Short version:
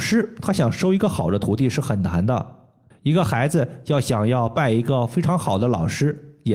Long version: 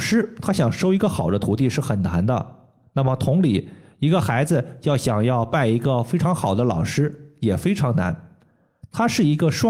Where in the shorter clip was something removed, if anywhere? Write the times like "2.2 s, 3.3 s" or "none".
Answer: 2.9 s